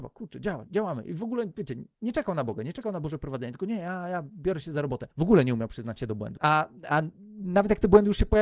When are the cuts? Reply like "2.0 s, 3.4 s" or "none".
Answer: none